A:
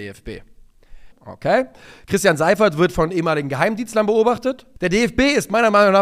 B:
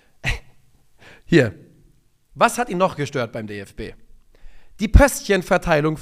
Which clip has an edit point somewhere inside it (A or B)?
A